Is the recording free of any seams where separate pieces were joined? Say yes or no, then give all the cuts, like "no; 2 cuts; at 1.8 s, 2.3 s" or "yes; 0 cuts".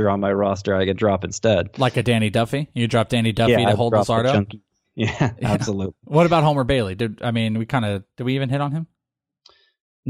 yes; 0 cuts